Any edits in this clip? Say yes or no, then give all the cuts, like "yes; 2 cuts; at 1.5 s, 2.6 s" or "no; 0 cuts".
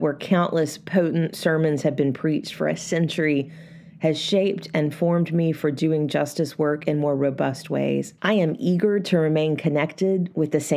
yes; 1 cut; at 8.2 s